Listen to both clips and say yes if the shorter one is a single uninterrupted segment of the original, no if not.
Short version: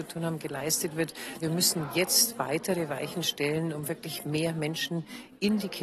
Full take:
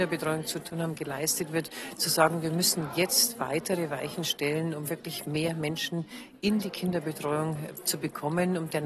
no